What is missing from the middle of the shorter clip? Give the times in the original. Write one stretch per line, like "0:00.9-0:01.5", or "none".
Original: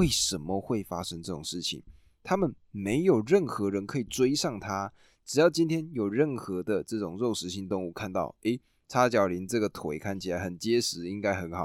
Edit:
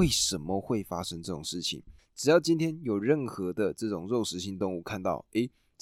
0:02.0-0:05.1

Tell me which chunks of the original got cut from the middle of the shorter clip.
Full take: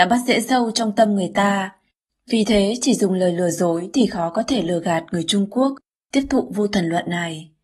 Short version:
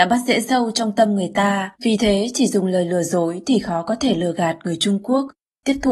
0:01.8-0:02.2

